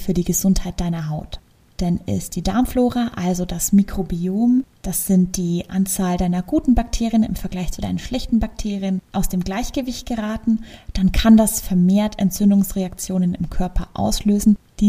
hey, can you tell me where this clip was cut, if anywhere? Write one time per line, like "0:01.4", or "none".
none